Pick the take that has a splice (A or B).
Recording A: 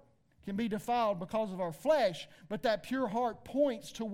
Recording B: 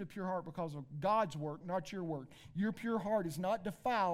B